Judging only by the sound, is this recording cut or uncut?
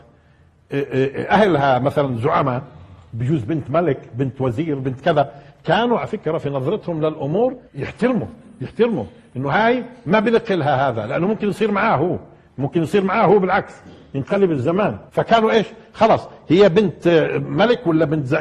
cut